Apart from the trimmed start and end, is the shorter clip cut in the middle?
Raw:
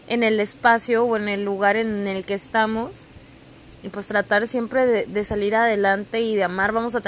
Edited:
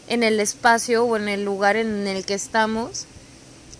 no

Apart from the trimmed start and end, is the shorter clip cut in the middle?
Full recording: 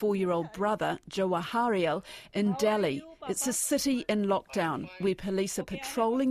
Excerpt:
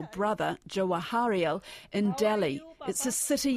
no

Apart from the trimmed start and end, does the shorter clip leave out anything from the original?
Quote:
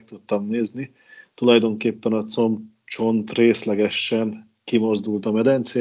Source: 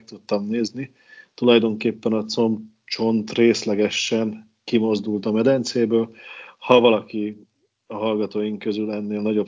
no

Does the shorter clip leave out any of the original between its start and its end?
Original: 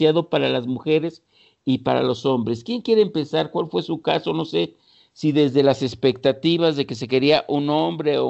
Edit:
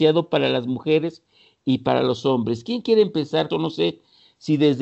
yes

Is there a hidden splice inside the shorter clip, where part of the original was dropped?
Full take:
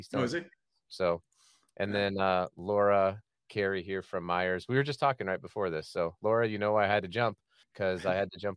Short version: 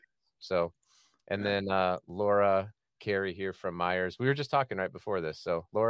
no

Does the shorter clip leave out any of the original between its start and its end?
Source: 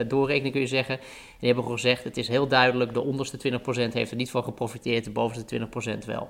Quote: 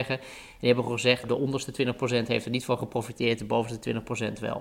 yes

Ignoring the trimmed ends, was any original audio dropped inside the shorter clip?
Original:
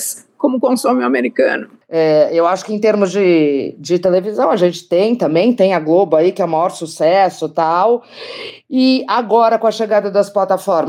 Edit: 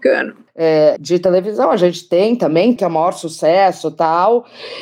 yes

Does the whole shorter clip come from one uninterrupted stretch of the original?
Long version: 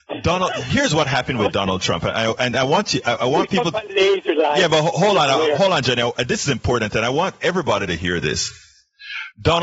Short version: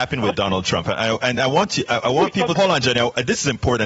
no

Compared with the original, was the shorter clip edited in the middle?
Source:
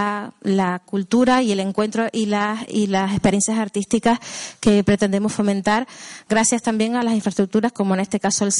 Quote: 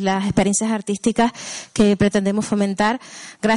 no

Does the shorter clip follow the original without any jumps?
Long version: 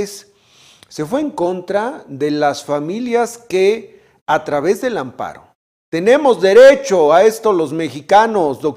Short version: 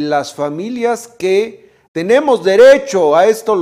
no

